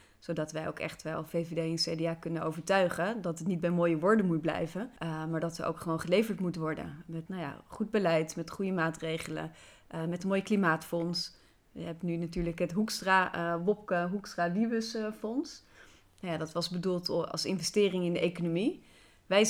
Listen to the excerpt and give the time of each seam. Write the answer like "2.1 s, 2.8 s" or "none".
5.0 s, 7.3 s